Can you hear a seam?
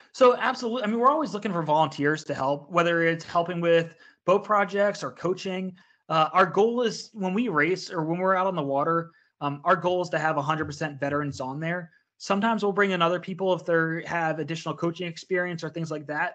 no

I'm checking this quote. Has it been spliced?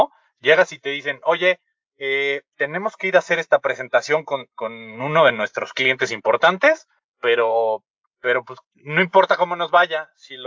no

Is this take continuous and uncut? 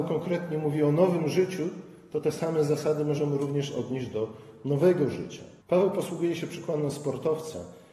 no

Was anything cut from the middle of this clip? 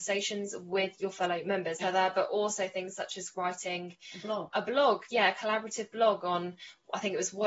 yes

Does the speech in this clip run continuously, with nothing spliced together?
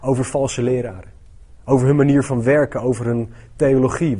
yes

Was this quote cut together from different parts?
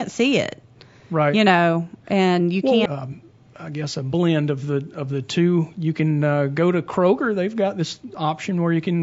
yes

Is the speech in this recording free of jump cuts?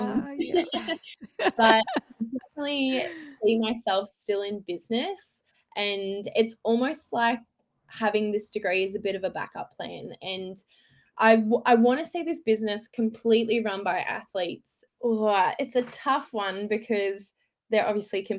no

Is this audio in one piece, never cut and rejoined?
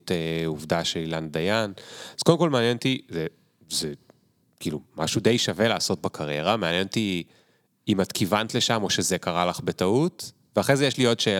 yes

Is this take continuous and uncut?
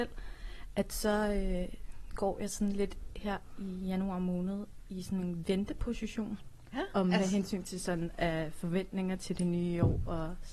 no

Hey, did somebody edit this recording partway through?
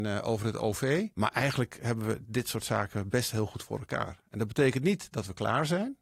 yes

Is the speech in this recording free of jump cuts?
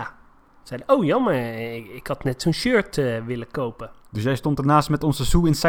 yes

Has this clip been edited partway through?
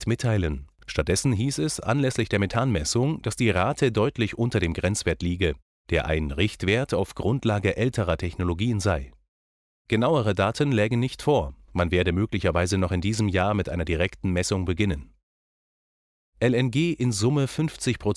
no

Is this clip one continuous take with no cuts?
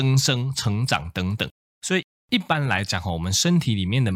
no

